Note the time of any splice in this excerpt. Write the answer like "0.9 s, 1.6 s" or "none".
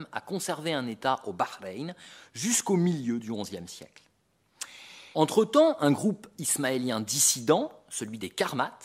5.1 s